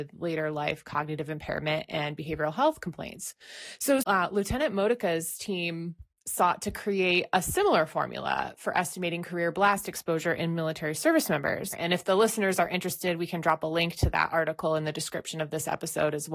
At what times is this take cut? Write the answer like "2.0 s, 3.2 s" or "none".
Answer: 4.0 s, 11.7 s